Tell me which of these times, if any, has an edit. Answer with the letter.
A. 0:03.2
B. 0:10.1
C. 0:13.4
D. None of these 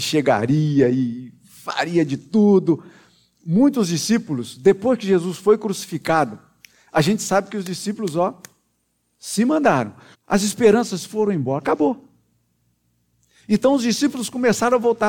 B